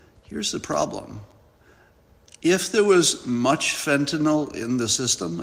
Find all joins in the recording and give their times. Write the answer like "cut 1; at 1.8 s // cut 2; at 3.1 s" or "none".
none